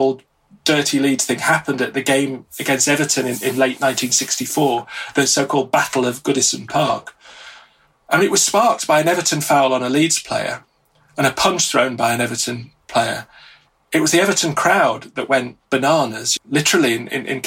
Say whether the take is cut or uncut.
cut